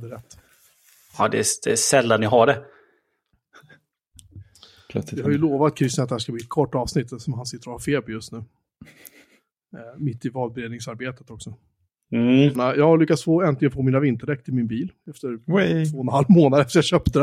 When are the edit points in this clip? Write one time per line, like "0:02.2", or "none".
0:01.1
0:12.5